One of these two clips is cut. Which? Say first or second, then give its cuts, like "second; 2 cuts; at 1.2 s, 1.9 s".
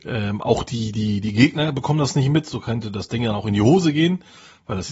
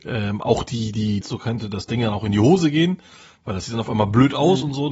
second; 1 cut; at 1.2 s